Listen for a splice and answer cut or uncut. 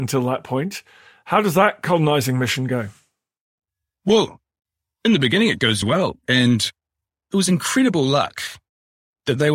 cut